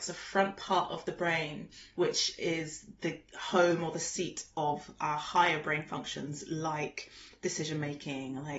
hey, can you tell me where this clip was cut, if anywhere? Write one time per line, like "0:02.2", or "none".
none

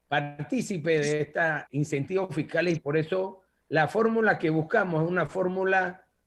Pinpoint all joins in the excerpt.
0:01.7

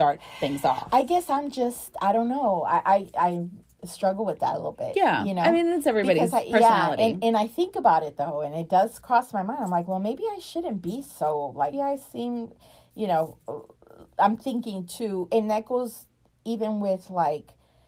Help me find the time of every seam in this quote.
0:11.7

